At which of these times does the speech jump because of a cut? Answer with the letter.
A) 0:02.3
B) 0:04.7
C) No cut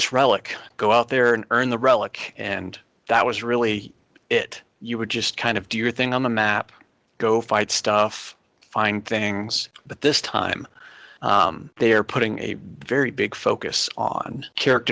C